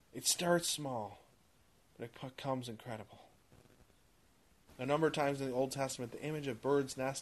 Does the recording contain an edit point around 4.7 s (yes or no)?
yes